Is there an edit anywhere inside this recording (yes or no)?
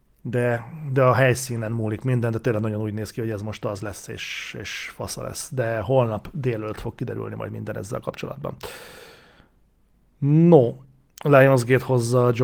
no